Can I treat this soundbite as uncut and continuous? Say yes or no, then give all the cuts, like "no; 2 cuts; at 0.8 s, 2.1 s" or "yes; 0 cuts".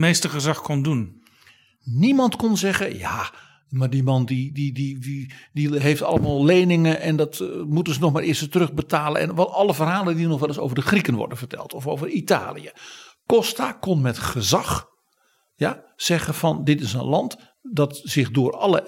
yes; 0 cuts